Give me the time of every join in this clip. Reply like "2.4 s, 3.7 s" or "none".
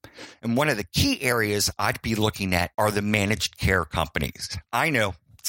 2.7 s